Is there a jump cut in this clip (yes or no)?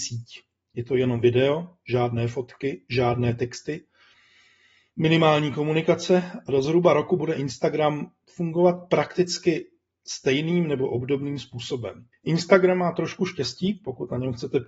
yes